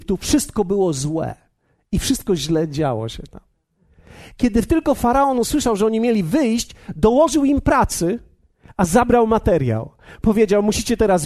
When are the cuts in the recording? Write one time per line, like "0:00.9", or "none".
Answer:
none